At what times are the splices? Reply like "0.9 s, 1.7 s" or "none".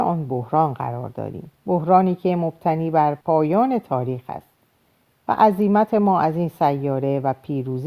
1.5 s, 3.2 s